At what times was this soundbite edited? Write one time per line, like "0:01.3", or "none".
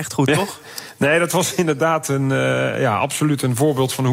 none